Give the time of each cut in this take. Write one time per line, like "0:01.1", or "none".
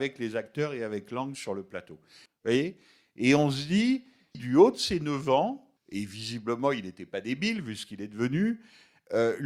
0:02.3
0:04.3
0:05.8